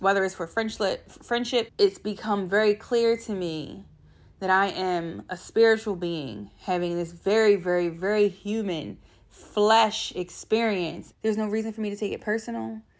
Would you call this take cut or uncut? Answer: cut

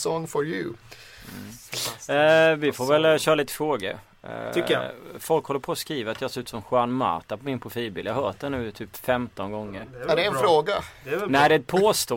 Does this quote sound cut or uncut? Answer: uncut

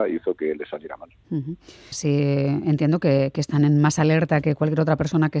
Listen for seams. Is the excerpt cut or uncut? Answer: cut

